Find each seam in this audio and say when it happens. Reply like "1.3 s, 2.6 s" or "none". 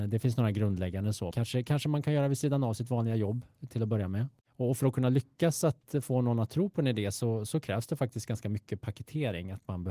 1.3 s